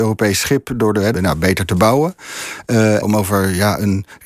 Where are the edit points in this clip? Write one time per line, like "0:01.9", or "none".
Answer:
0:01.1
0:03.0